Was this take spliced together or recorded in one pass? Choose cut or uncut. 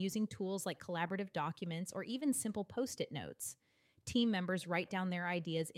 uncut